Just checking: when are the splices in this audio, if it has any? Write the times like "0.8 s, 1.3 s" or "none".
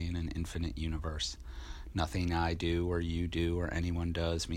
none